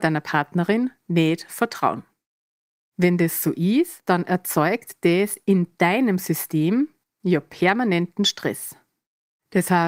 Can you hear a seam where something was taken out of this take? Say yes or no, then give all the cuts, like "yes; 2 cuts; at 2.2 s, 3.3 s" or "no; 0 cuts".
no; 0 cuts